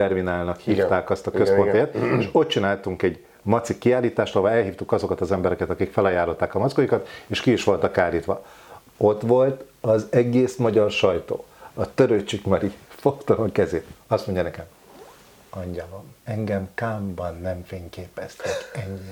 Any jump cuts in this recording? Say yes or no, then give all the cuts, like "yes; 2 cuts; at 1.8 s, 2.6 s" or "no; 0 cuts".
yes; 1 cut; at 16.2 s